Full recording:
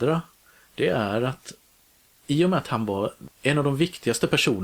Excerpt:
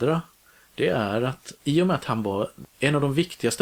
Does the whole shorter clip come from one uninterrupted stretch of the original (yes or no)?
no